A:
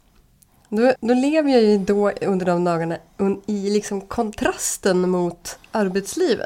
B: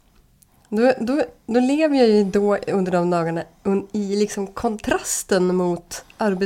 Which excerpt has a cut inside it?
A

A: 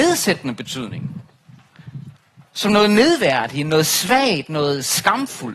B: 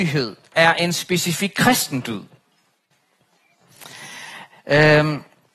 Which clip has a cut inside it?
B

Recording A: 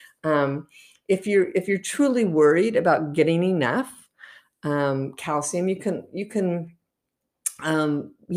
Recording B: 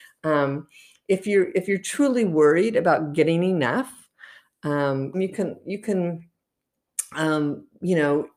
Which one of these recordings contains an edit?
B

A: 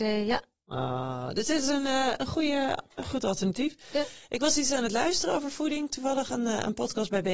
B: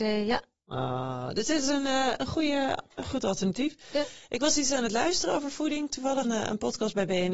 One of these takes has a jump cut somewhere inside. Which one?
B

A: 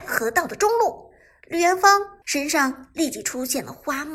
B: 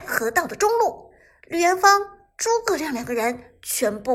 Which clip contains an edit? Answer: A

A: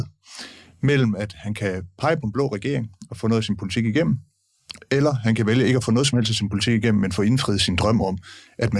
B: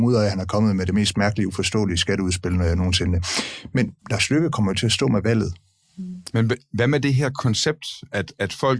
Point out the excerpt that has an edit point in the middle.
B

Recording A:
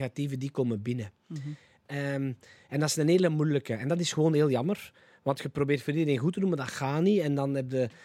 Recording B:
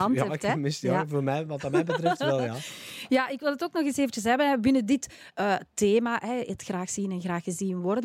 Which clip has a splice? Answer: A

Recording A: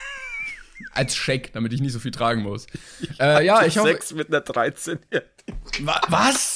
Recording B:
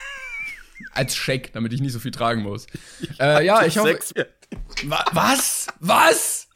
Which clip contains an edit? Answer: B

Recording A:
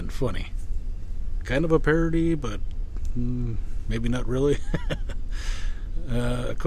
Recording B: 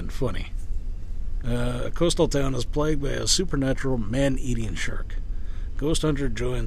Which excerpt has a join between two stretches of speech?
B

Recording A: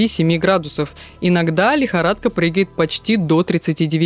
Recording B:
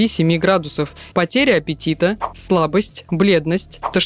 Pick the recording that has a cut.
B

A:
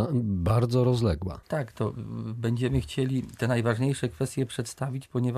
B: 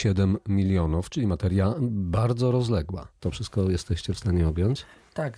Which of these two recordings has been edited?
A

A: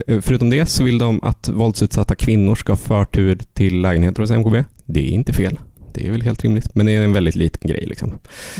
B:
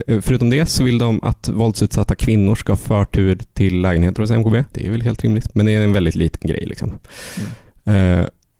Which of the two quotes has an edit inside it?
B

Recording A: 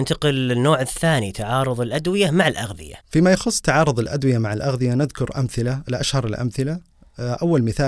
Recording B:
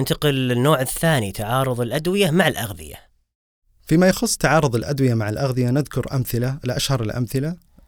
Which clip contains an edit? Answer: A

